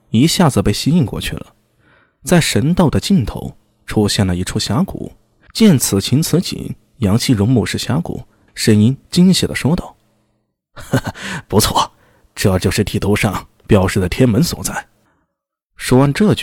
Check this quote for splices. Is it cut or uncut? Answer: cut